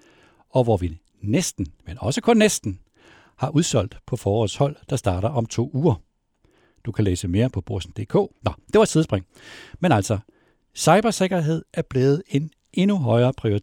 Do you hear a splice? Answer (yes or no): yes